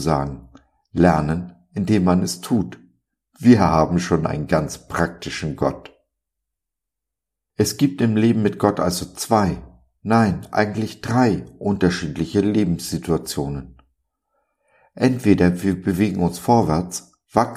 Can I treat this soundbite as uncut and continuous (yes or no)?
yes